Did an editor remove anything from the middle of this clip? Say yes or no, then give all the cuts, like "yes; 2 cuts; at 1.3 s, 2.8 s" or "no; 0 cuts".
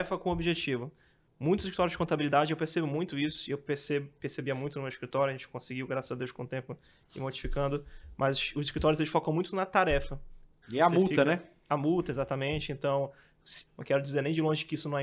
yes; 2 cuts; at 10.6 s, 13.7 s